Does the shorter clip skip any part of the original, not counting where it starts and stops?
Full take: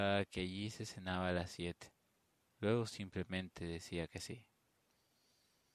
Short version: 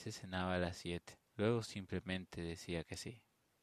yes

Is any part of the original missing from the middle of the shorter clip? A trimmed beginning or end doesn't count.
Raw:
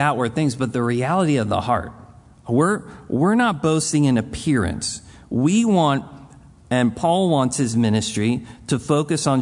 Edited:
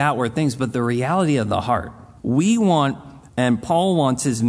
yes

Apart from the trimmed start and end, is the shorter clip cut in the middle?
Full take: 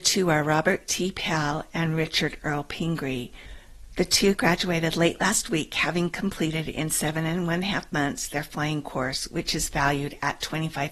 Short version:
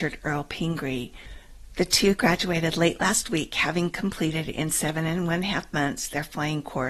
no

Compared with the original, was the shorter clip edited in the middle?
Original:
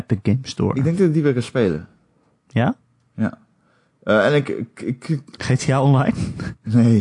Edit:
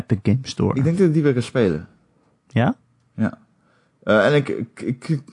no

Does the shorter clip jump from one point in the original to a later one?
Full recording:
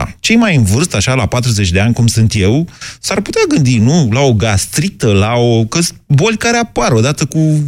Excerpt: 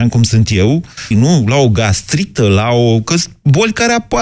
yes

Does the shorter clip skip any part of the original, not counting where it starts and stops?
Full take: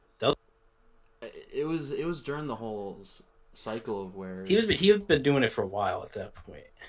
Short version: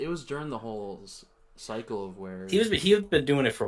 no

